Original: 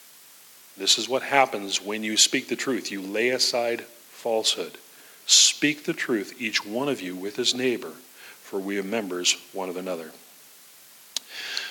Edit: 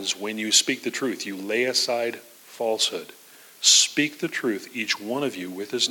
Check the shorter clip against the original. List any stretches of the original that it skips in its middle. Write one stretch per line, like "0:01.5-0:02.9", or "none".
none